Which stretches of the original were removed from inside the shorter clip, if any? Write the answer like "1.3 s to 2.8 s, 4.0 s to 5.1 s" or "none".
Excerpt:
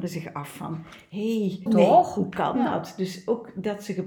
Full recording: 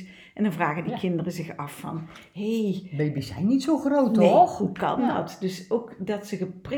2.9 s to 4.1 s